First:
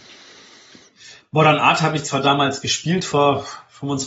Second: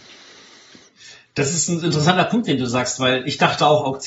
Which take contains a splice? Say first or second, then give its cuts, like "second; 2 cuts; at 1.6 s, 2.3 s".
first; 1 cut; at 1.2 s